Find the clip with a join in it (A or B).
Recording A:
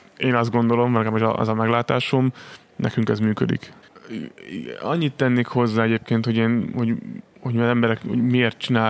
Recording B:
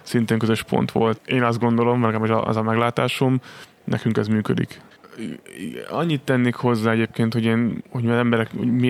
B